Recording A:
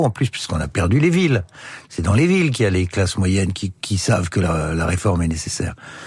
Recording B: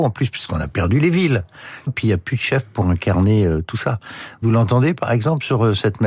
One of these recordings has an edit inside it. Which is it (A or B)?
B